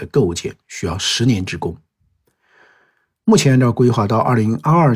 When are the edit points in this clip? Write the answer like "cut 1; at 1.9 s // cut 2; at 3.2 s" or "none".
none